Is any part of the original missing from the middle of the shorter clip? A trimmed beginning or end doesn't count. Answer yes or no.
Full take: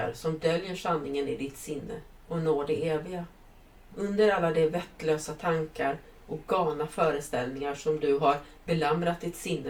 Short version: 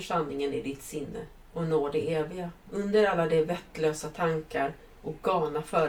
yes